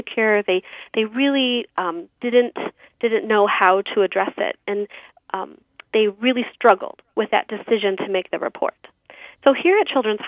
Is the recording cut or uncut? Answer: cut